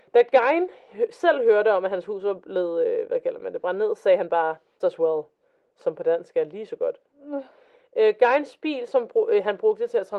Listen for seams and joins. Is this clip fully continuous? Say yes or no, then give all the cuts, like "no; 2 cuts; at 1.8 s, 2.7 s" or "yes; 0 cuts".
no; 1 cut; at 4.8 s